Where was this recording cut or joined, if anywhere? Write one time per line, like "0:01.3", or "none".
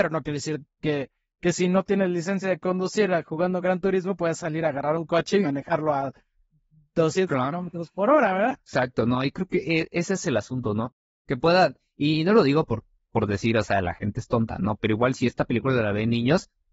0:08.6